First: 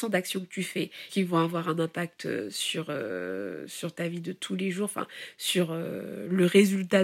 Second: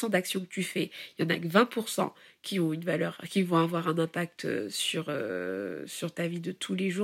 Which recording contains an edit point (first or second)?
first